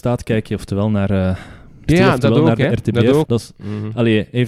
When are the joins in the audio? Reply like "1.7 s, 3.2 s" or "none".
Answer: 1.9 s, 3.3 s